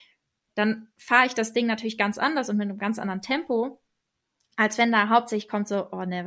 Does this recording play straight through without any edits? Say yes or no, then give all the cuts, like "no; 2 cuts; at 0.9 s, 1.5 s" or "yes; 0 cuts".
yes; 0 cuts